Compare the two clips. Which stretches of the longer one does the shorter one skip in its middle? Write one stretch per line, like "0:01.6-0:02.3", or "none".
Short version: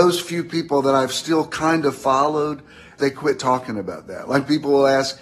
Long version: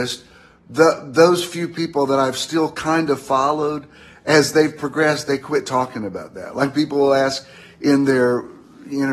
0:04.2-0:05.3